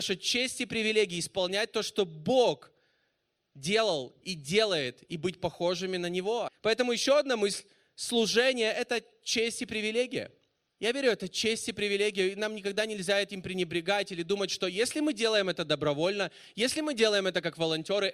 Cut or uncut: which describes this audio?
cut